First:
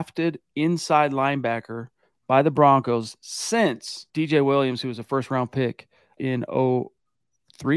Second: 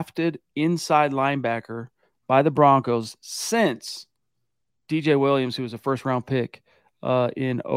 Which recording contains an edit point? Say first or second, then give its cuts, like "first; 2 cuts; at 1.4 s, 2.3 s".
first; 2 cuts; at 4.1 s, 6.2 s